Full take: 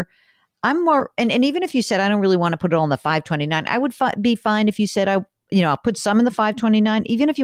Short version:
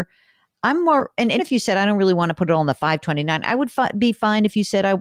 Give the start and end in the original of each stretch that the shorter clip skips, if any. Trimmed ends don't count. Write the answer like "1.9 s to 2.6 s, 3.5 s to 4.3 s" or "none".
1.4 s to 1.6 s